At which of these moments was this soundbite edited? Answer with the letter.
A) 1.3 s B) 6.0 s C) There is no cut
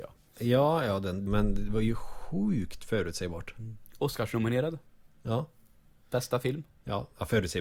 A